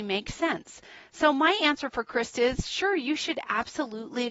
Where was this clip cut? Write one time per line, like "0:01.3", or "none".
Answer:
none